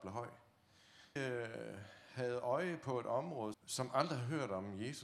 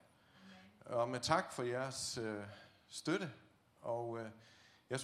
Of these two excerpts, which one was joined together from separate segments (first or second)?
first